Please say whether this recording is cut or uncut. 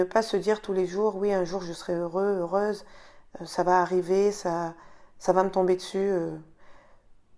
uncut